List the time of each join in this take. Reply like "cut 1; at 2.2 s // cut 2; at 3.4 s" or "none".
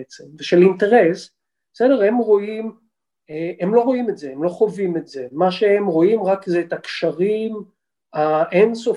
none